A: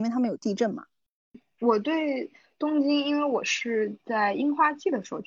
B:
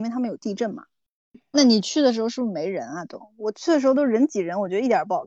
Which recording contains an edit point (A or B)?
B